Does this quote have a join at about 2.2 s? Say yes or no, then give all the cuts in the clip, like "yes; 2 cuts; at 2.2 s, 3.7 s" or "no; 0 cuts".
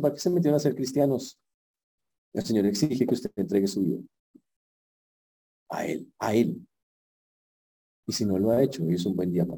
yes; 2 cuts; at 2.2 s, 6.1 s